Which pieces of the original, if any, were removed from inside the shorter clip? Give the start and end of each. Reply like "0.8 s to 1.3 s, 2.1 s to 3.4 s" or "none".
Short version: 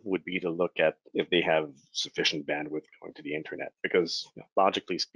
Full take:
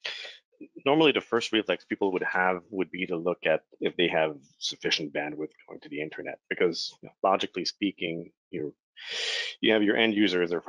none